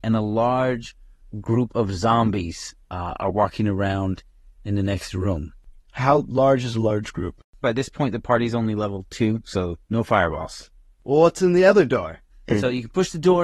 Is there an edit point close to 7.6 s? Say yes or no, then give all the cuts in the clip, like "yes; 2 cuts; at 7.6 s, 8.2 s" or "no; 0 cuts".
yes; 3 cuts; at 7.6 s, 11.0 s, 12.3 s